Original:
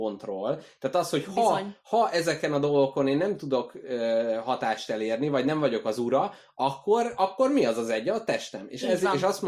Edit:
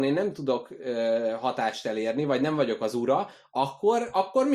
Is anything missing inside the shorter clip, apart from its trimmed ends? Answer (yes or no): no